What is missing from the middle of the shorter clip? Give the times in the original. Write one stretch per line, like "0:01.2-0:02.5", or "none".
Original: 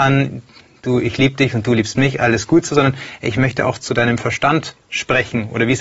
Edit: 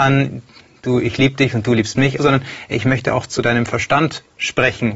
0:02.2-0:02.7